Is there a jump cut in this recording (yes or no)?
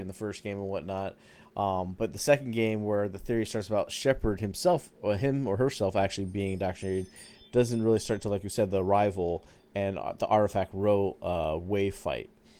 no